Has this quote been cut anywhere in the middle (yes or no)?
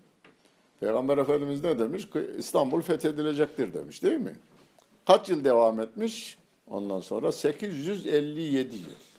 no